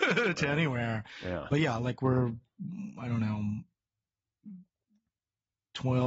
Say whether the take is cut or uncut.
uncut